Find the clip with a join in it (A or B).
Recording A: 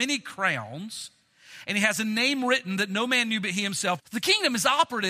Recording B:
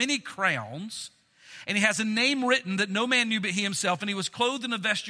A